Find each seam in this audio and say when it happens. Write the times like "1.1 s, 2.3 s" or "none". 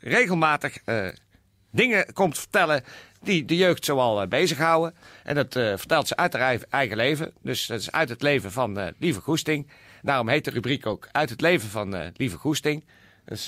none